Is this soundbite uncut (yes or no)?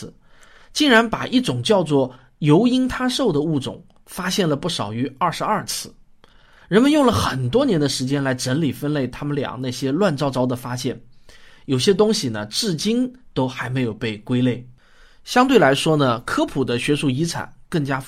yes